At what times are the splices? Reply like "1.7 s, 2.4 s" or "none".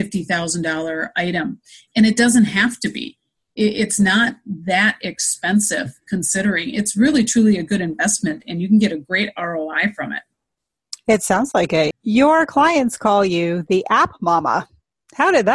11.9 s